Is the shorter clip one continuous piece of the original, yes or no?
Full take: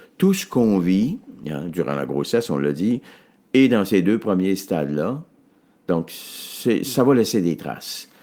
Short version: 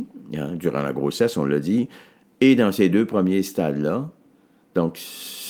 yes